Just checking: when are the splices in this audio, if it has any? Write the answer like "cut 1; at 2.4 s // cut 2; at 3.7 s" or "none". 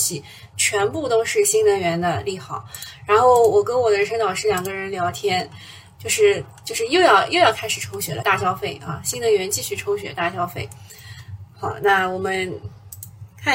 cut 1; at 8.2 s